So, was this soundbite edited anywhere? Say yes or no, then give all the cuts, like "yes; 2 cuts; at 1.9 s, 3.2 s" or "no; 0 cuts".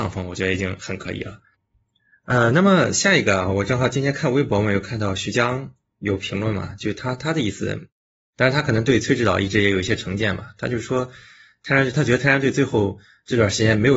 no; 0 cuts